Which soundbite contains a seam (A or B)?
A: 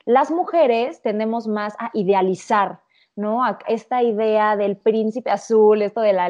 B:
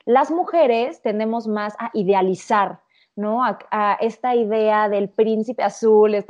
A